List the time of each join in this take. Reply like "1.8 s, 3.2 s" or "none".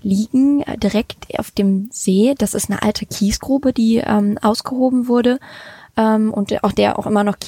none